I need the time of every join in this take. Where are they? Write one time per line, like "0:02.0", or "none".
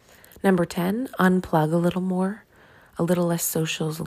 none